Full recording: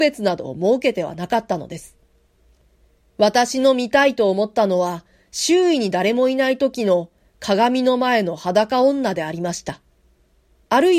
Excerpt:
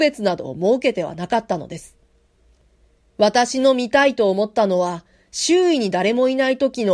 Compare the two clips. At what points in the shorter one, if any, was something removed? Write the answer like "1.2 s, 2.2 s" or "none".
none